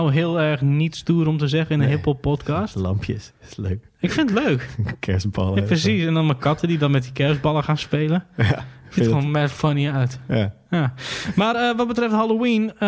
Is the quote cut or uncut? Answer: uncut